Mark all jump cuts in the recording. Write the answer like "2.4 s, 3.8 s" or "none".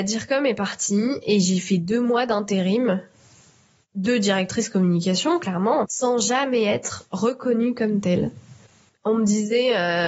5.8 s